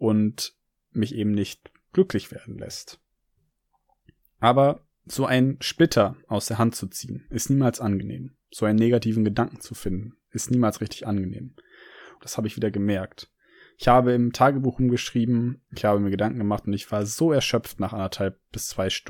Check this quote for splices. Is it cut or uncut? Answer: cut